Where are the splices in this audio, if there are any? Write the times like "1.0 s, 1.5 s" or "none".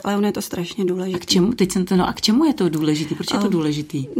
none